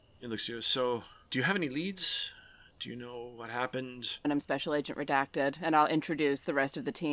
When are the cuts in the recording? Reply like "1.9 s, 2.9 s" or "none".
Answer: 4.2 s